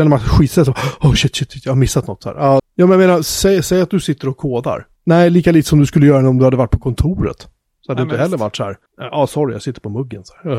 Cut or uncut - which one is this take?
cut